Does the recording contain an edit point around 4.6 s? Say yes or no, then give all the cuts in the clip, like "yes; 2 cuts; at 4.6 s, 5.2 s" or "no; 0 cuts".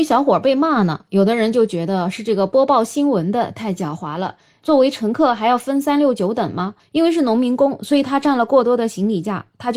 yes; 1 cut; at 4.6 s